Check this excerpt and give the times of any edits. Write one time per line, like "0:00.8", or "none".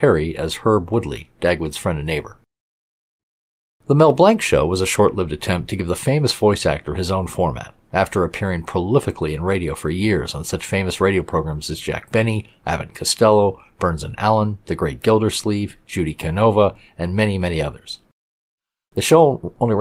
none